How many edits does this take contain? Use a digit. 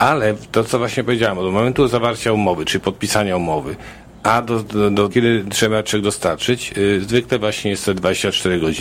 1